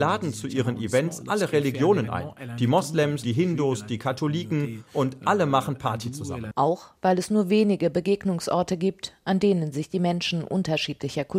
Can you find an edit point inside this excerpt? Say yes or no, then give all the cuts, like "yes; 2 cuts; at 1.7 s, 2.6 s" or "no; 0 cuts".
yes; 2 cuts; at 3.2 s, 6.5 s